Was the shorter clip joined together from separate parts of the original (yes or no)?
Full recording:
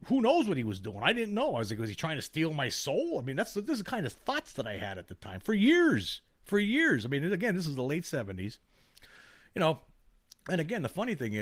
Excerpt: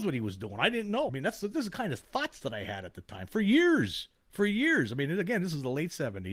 yes